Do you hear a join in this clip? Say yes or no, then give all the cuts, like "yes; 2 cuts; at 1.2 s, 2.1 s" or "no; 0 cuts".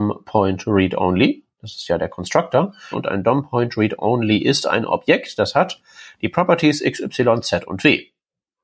yes; 1 cut; at 2.9 s